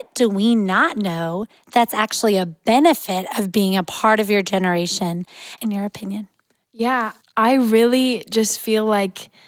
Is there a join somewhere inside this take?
yes; 2 cuts; at 5.6 s, 7.2 s

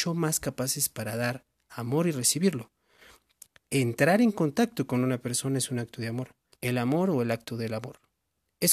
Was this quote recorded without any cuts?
no; 2 cuts; at 3.7 s, 6.5 s

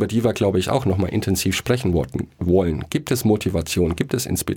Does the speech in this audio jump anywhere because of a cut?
no; 0 cuts

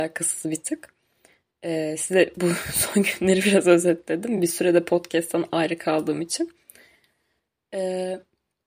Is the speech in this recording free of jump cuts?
yes; 0 cuts

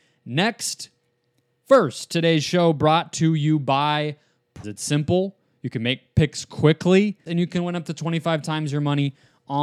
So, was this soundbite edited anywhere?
yes; 2 cuts; at 4.6 s, 7.3 s

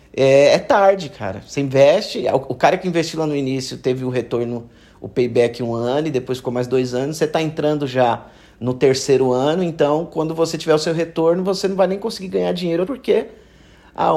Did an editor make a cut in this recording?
yes; 1 cut; at 12.8 s

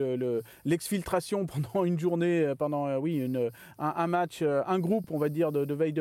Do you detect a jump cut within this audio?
no; 0 cuts

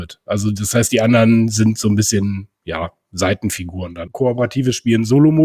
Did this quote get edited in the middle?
yes; 1 cut; at 4.1 s

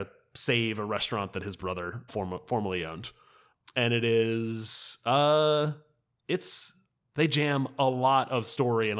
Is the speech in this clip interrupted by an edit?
yes; 1 cut; at 2.1 s

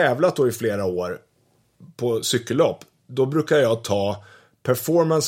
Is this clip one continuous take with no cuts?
yes; 0 cuts

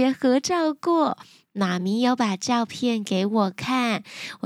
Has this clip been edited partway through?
no; 0 cuts

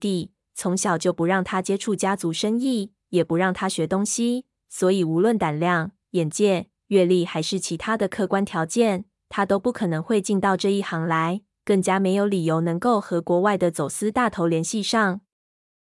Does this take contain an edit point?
no; 0 cuts

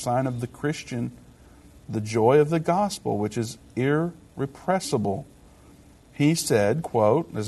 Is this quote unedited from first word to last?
yes; 0 cuts

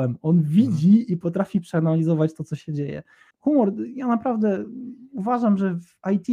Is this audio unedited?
no; 1 cut; at 3.3 s

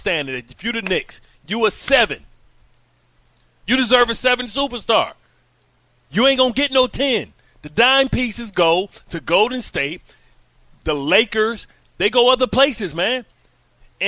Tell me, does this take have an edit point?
no; 0 cuts

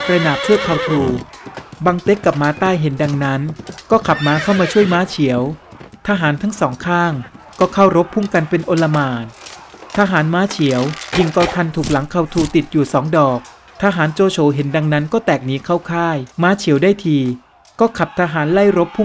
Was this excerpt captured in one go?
no; 1 cut; at 16.3 s

